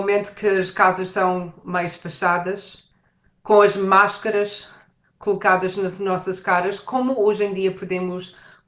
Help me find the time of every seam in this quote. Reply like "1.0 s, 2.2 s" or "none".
none